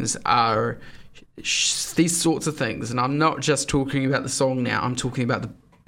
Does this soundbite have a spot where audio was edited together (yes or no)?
no